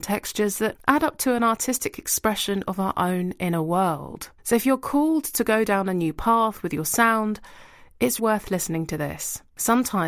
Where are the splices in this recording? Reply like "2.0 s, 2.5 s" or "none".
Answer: 4.4 s, 8.2 s